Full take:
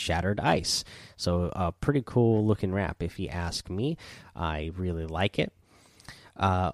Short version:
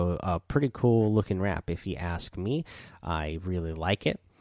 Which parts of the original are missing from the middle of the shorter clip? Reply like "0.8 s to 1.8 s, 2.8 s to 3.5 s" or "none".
none